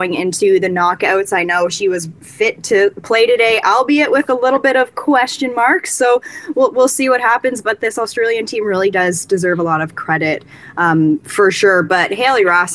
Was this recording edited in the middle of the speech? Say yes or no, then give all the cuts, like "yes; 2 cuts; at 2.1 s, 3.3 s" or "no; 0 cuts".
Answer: no; 0 cuts